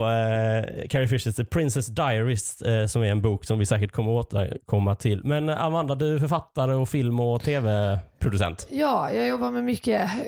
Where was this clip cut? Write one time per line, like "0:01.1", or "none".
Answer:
none